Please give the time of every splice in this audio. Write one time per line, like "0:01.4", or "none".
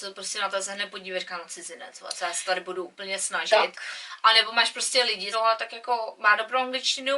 0:05.3